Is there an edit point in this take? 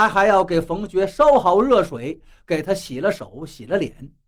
no; 0 cuts

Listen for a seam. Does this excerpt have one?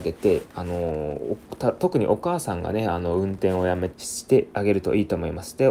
yes; 1 cut; at 3.9 s

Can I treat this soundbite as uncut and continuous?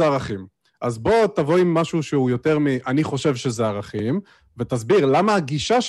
yes; 0 cuts

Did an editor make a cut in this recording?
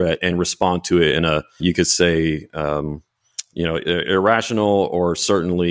yes; 1 cut; at 1.6 s

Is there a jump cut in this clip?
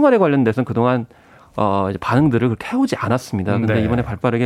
no; 0 cuts

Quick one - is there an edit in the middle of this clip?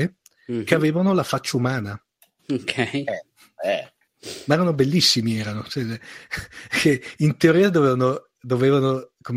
no; 0 cuts

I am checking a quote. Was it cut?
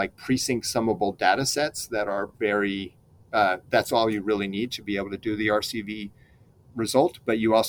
no; 0 cuts

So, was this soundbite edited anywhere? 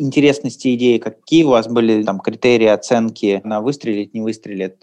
yes; 2 cuts; at 2.0 s, 3.4 s

